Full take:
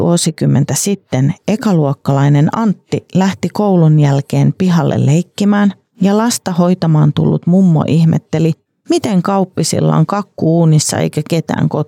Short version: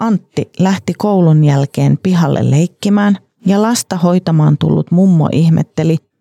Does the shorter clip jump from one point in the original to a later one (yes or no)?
no